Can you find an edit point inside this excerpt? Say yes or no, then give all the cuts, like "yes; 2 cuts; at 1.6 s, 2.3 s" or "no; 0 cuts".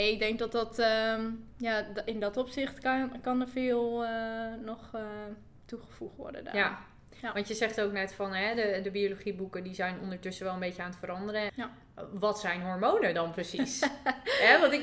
yes; 1 cut; at 11.5 s